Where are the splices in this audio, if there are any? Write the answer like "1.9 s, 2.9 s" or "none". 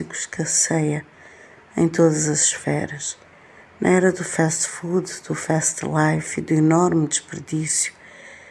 none